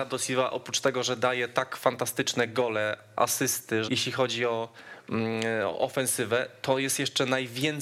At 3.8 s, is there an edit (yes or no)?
yes